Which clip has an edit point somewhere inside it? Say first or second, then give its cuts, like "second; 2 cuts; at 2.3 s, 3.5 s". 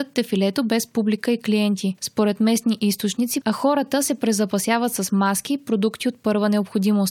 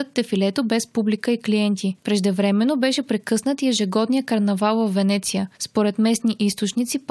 first; 2 cuts; at 2.0 s, 3.4 s